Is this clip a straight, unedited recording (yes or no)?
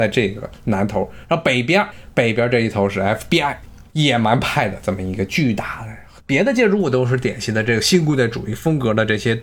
no